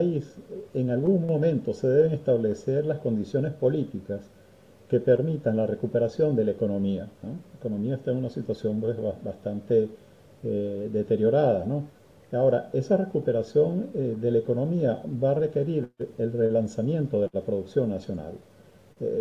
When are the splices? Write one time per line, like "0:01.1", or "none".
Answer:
none